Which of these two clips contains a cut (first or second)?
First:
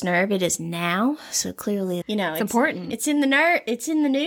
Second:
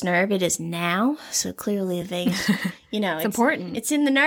first